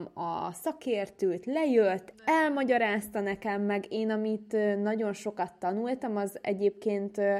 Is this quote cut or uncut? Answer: cut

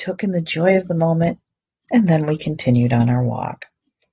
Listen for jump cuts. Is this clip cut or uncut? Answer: uncut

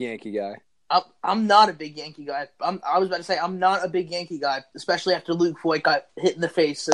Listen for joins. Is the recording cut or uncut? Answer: cut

